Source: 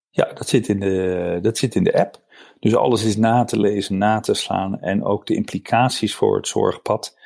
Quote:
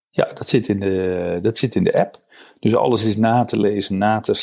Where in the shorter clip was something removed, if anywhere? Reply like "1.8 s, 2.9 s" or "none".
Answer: none